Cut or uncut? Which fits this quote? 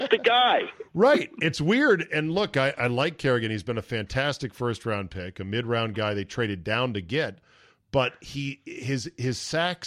uncut